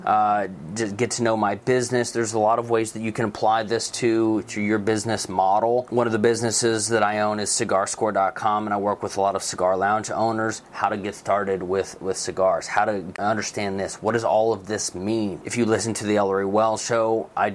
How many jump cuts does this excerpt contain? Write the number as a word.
zero